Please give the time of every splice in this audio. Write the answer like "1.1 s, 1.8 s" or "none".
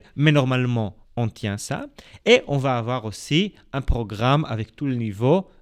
1.0 s